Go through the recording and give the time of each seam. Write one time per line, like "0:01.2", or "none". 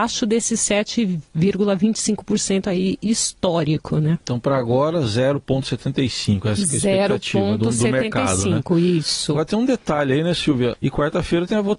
0:10.7